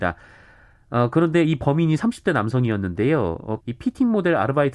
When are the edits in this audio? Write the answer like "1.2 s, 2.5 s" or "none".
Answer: 3.6 s